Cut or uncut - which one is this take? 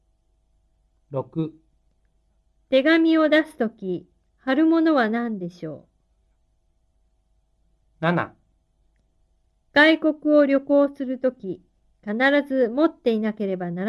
uncut